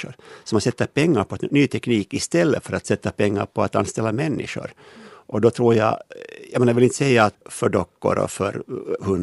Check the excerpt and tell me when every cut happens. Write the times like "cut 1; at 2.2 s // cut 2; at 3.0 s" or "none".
cut 1; at 7.3 s

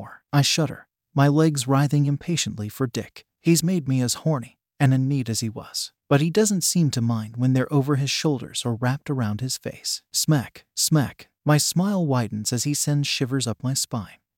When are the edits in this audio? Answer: cut 1; at 6.0 s // cut 2; at 10.1 s

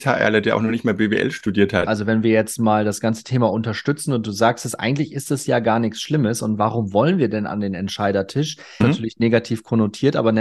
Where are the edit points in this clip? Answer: cut 1; at 1.9 s // cut 2; at 8.8 s

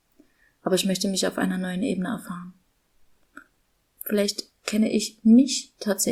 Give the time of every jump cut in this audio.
cut 1; at 4.0 s

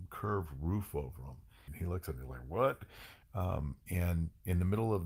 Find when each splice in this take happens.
cut 1; at 1.7 s // cut 2; at 3.2 s

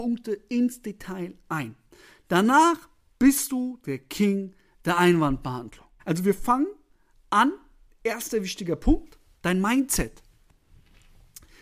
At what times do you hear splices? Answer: cut 1; at 6.0 s

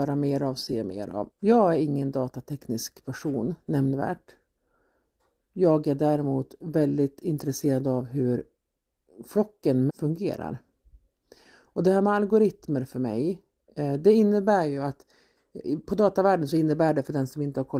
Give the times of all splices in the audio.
cut 1; at 1.3 s // cut 2; at 9.9 s

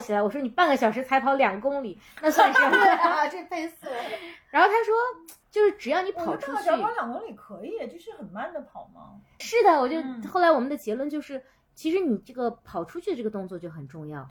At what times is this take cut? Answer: cut 1; at 9.4 s

